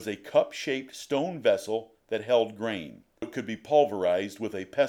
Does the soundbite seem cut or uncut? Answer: cut